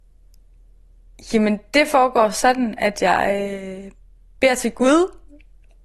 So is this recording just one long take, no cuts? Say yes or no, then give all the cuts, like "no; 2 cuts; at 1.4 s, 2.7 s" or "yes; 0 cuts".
yes; 0 cuts